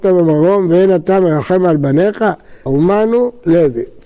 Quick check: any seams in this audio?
yes; 1 cut; at 2.7 s

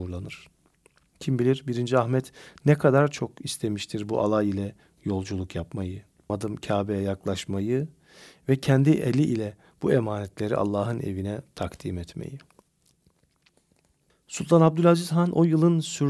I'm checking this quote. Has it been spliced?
yes; 1 cut; at 6.3 s

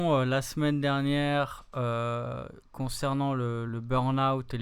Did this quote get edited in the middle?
yes; 1 cut; at 3.7 s

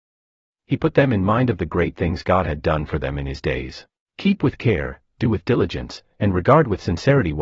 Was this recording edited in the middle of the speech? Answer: yes; 1 cut; at 4.1 s

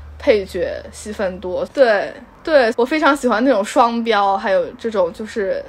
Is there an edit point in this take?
yes; 2 cuts; at 1.7 s, 2.7 s

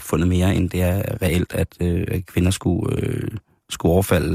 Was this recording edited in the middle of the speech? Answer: no; 0 cuts

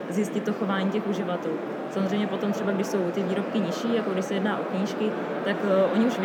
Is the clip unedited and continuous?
yes; 0 cuts

